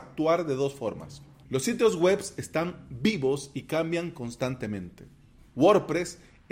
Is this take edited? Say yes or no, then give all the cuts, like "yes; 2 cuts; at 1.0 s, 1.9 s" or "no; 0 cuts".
yes; 1 cut; at 1.4 s